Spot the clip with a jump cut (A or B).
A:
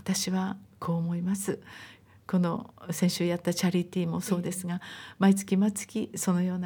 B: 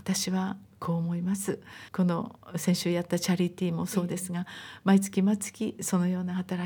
B